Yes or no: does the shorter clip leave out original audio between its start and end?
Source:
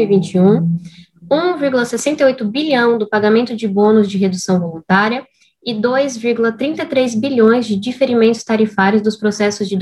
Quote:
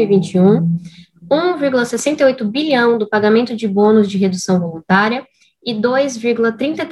no